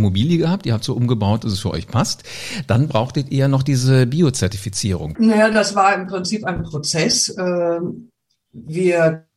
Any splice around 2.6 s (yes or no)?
no